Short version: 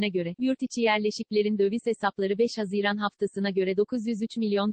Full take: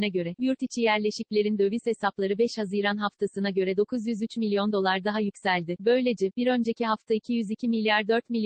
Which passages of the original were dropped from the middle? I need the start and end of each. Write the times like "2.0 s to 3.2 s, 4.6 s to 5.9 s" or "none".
none